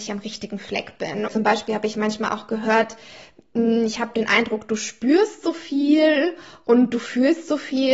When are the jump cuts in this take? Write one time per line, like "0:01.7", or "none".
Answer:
0:01.3